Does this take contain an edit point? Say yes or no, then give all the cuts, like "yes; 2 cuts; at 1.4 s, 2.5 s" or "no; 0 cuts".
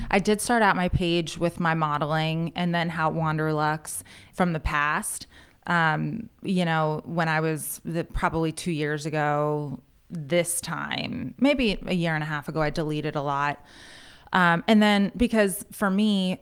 yes; 1 cut; at 4.3 s